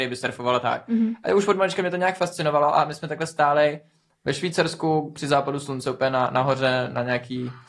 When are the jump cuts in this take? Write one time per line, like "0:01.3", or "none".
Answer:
none